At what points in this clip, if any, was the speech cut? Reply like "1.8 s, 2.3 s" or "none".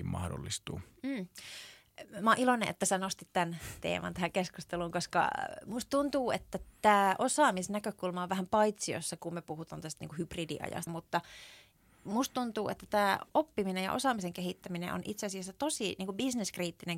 10.9 s, 13.3 s